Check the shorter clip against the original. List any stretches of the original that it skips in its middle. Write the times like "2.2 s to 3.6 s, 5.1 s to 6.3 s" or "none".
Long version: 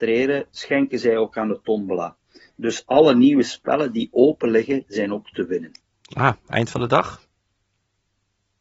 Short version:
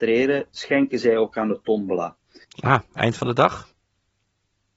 2.4 s to 6.0 s